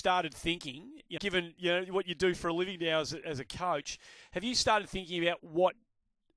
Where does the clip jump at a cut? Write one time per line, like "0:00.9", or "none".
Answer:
0:01.2
0:03.2